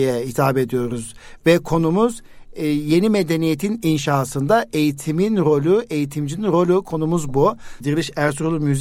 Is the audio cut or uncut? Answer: cut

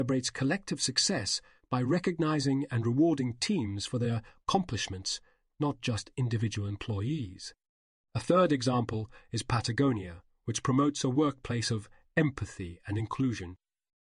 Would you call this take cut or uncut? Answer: uncut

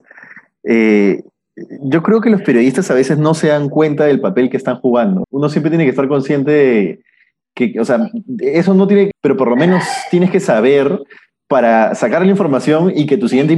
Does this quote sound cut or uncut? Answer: cut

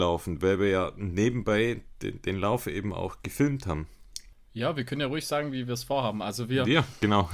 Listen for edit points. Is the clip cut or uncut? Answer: cut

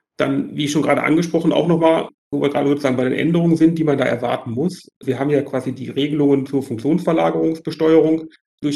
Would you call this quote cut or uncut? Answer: uncut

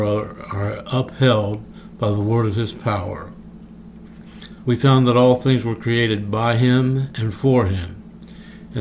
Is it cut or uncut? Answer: cut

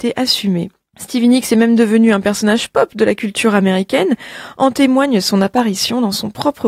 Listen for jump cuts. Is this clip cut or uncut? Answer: uncut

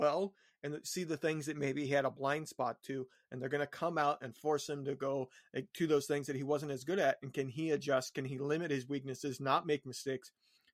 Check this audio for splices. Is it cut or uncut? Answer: uncut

